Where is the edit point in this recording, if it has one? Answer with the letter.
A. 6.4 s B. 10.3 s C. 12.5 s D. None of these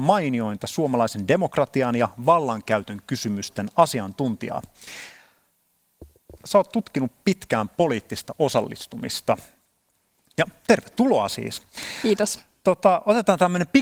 A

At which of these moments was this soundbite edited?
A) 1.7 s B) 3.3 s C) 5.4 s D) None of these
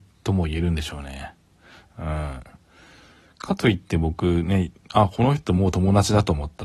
D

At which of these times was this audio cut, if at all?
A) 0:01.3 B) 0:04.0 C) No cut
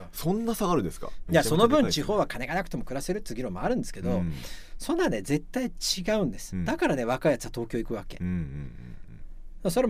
A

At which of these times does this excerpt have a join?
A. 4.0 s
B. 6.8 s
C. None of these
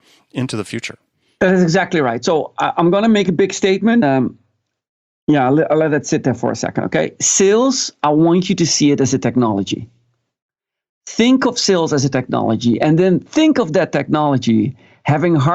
A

